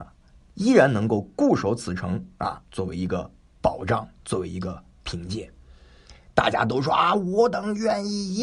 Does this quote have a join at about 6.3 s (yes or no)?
yes